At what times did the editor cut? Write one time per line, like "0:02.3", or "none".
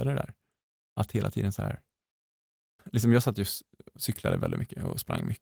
0:02.8